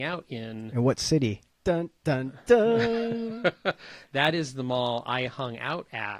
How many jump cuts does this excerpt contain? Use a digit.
1